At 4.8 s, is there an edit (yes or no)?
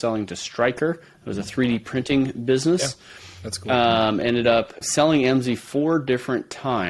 yes